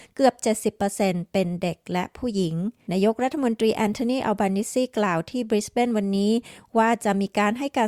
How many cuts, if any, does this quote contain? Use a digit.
1